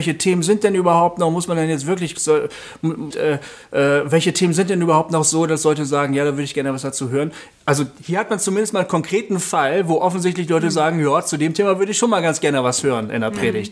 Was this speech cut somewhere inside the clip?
yes; 1 cut; at 3.1 s

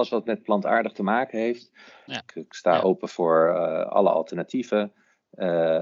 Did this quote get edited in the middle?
yes; 1 cut; at 2.1 s

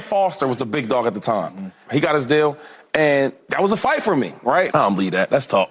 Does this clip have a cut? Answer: yes; 2 cuts; at 1.9 s, 4.7 s

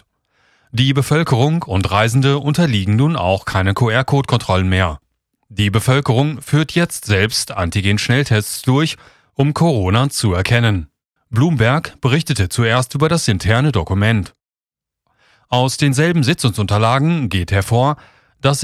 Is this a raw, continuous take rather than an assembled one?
no; 1 cut; at 11.2 s

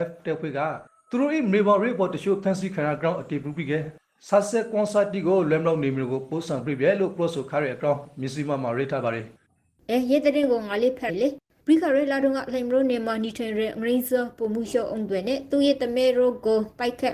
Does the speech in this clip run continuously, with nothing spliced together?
no; 1 cut; at 11.1 s

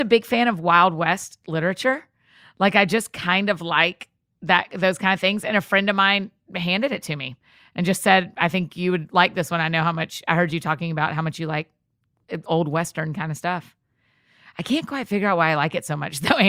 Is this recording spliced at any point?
no; 0 cuts

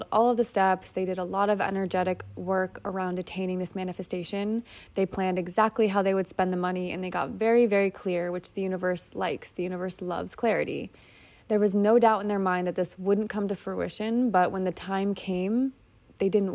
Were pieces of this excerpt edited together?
no; 0 cuts

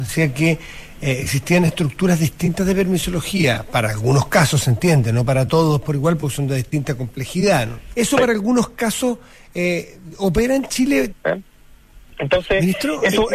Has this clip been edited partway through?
yes; 2 cuts; at 7.9 s, 11.1 s

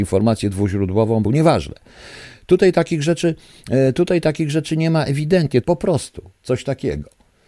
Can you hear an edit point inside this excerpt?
yes; 2 cuts; at 1.2 s, 5.6 s

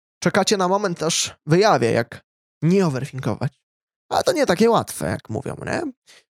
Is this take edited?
no; 0 cuts

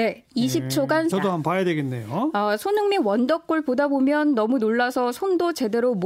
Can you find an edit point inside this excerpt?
yes; 1 cut; at 1.1 s

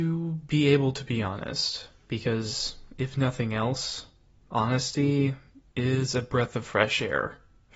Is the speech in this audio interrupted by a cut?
no; 0 cuts

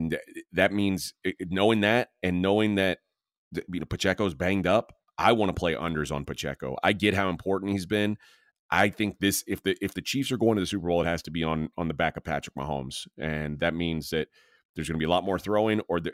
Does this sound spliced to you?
no; 0 cuts

